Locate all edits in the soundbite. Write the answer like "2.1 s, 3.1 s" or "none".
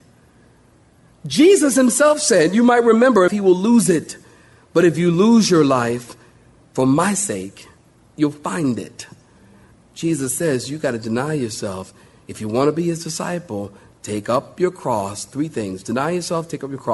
3.3 s